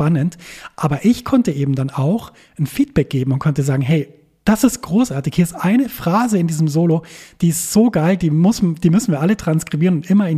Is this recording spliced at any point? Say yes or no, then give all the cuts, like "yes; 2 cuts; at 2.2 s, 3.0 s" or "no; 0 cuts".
no; 0 cuts